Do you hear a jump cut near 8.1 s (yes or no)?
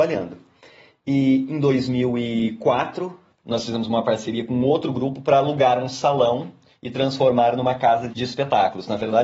yes